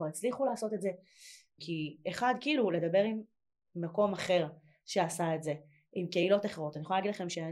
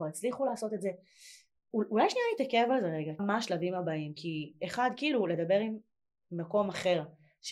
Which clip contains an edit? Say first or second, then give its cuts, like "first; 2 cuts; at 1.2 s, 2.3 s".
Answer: first; 1 cut; at 1.6 s